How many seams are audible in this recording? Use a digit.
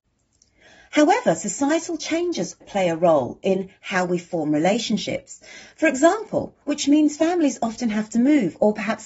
2